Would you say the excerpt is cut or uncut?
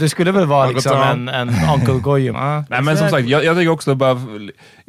cut